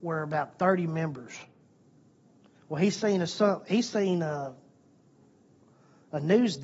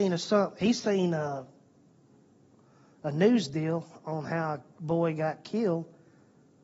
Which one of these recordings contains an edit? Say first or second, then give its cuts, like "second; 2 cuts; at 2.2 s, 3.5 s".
first; 1 cut; at 2.6 s